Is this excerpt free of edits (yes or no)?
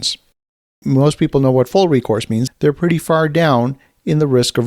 no